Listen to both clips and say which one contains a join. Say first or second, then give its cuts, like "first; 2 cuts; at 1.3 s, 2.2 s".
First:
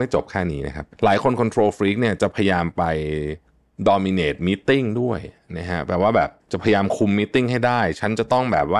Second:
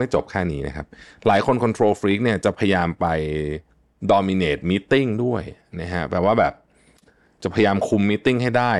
first; 2 cuts; at 0.9 s, 6.4 s